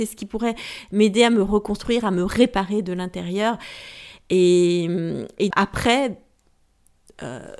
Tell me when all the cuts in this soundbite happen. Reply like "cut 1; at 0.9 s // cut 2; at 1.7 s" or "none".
cut 1; at 5.5 s